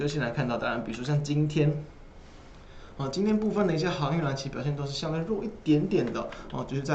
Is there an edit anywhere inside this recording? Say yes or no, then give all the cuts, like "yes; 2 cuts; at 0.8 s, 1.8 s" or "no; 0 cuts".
no; 0 cuts